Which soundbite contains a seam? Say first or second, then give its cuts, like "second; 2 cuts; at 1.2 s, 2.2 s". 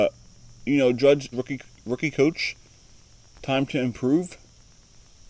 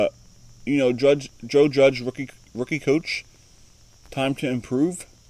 first; 1 cut; at 1.3 s